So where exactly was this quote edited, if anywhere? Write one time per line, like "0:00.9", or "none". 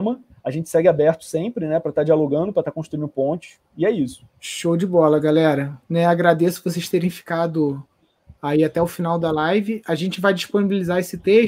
0:04.3
0:05.8